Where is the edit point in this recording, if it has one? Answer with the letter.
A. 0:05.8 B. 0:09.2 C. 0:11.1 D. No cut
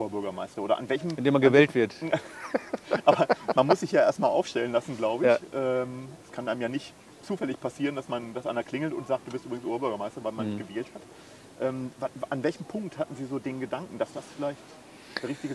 D